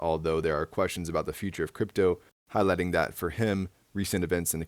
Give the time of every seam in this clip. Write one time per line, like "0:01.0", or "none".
0:02.3